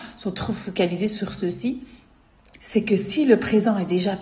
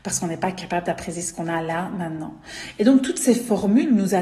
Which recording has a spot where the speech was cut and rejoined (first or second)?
first